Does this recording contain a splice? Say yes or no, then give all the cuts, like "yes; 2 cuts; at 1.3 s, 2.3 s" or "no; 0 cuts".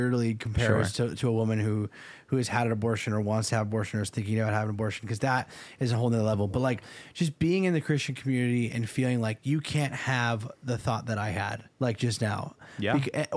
yes; 1 cut; at 11.7 s